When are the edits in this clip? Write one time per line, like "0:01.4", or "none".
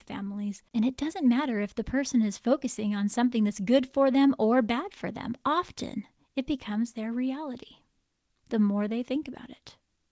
none

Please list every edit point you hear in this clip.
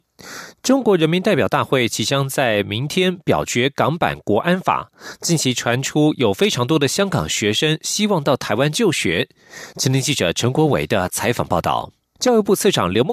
0:09.7
0:12.2

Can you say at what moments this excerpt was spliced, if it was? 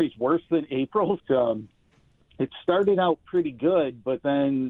0:01.2

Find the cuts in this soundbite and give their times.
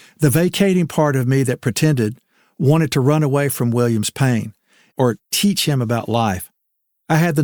0:04.9

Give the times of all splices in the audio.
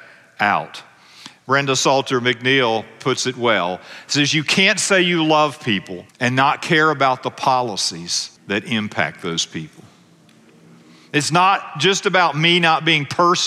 0:06.1
0:08.4

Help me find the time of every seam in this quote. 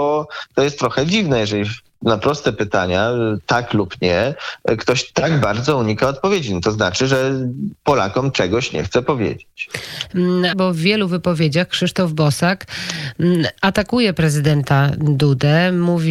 0:10.5

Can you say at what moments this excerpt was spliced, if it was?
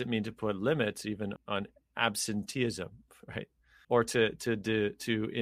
0:01.4
0:03.8

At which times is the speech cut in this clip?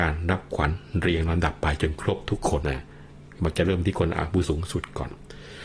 0:02.6
0:04.5

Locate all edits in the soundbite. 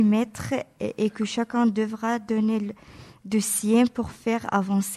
none

